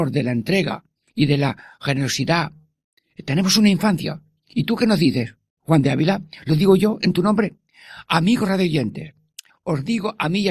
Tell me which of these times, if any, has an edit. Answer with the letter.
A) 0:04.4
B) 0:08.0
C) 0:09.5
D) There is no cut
C